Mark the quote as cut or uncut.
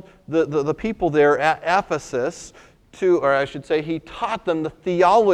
uncut